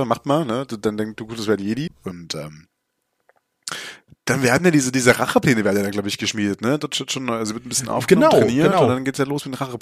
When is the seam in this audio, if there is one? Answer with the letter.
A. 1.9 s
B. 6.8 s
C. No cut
A